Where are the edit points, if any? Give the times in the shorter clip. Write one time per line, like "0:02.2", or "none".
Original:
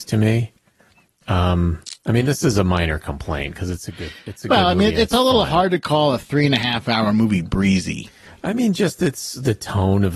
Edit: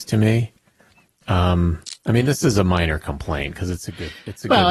none